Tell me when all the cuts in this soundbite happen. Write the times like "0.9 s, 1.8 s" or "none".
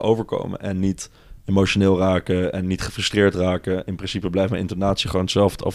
none